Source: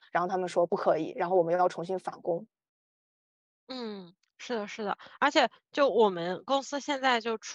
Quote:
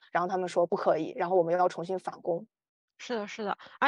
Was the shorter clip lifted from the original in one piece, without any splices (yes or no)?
no